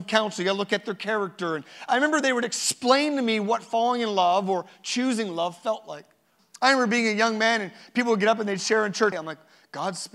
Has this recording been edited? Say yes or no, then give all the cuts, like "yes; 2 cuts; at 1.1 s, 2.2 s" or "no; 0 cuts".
yes; 2 cuts; at 6.4 s, 9.1 s